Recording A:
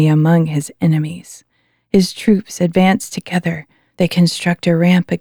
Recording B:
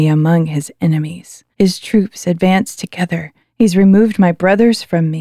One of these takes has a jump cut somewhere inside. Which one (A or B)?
B